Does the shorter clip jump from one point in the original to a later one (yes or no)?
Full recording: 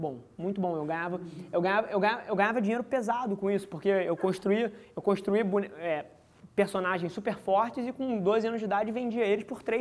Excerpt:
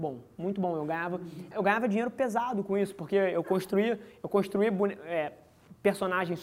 yes